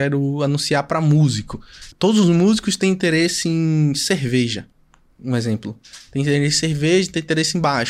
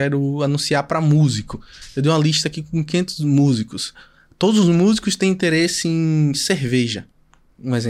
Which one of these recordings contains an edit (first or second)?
first